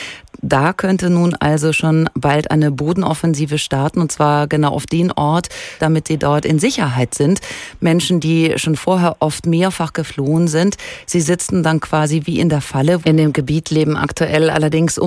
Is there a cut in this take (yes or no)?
yes